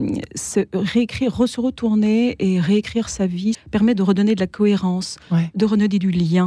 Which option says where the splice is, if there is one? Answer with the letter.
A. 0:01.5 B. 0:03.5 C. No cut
B